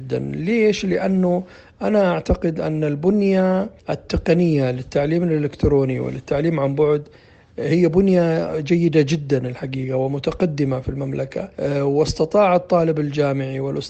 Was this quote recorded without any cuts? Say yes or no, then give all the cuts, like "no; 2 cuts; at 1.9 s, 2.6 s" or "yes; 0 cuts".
no; 2 cuts; at 3.8 s, 11.5 s